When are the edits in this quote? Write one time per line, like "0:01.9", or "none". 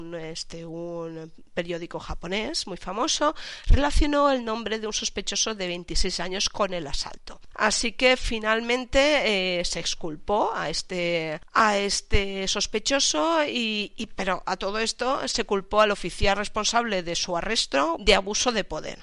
0:07.5
0:17.9

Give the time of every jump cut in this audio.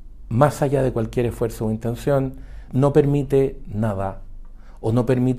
0:02.7

